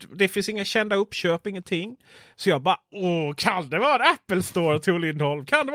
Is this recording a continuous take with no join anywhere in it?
yes; 0 cuts

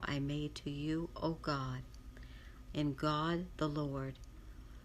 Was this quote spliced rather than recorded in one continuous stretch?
yes; 1 cut; at 2.7 s

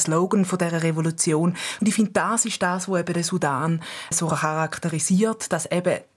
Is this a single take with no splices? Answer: no; 2 cuts; at 1.8 s, 4.1 s

